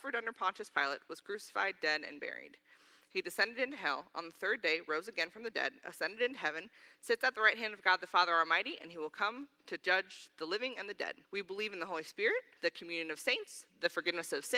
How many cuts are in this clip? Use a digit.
2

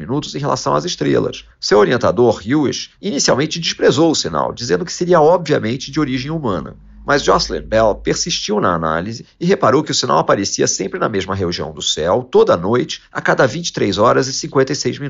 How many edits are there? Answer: 1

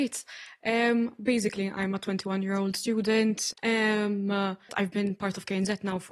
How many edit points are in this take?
2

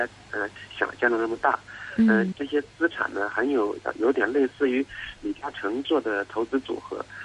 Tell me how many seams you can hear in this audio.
1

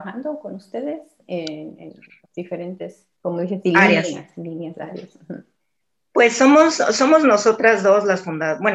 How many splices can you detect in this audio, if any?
1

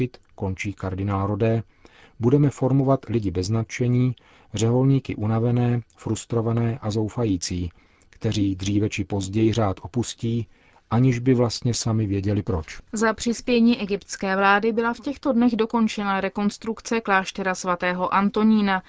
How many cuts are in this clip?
1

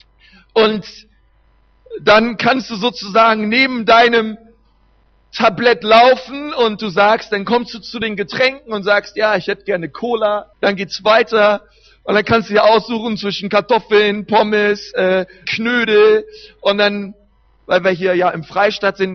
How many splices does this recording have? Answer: 2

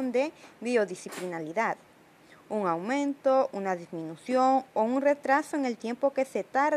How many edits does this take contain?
0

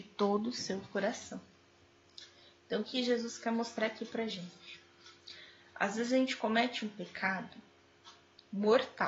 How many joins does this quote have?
1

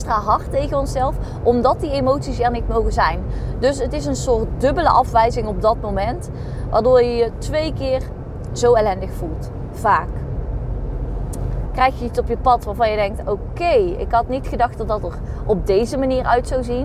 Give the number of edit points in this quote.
1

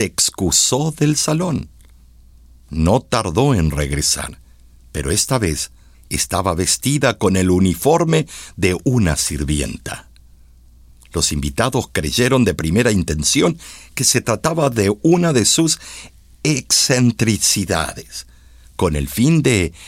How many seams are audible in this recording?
1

